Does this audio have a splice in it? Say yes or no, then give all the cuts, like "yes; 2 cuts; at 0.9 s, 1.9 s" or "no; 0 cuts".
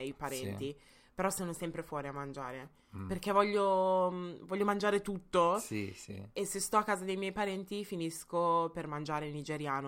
no; 0 cuts